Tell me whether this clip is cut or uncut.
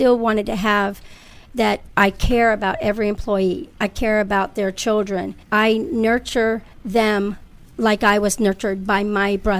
cut